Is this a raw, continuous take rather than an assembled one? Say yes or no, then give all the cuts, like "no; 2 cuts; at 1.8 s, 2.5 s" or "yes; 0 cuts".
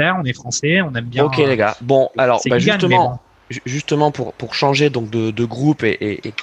yes; 0 cuts